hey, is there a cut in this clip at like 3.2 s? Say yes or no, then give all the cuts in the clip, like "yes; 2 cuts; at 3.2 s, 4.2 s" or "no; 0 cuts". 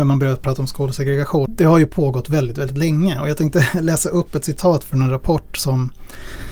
no; 1 cut; at 1.5 s